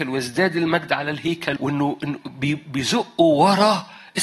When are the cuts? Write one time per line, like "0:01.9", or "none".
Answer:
0:01.6